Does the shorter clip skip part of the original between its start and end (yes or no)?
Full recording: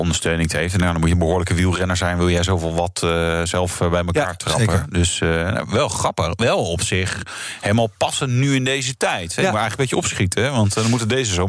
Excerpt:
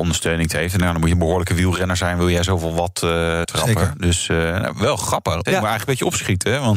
yes